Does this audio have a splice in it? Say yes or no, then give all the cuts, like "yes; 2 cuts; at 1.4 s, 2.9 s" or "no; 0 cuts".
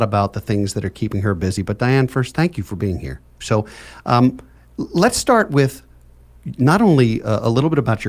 yes; 1 cut; at 3.4 s